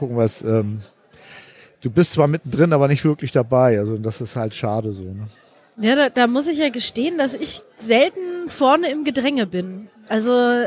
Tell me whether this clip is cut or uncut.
uncut